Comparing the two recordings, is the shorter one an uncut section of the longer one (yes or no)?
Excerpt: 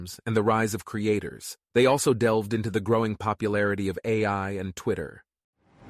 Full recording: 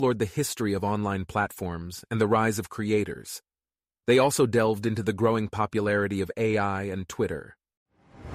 no